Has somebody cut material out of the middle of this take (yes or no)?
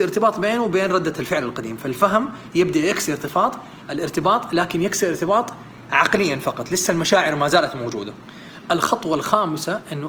no